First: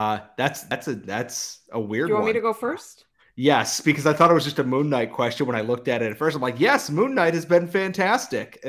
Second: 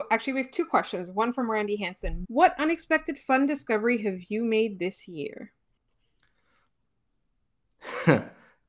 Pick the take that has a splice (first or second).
second